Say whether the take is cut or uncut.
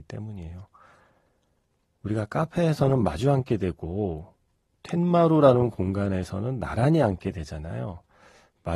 uncut